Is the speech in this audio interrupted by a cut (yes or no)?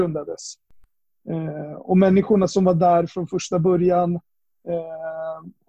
no